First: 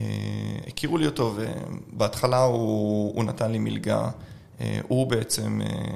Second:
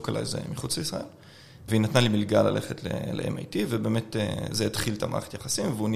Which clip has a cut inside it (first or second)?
second